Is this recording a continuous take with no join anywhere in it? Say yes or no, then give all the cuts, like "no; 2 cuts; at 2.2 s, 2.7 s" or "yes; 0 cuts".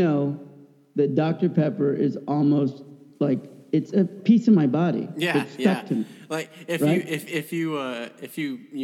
yes; 0 cuts